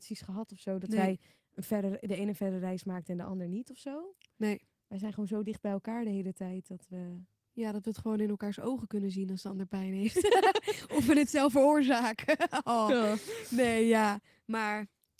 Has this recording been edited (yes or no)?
no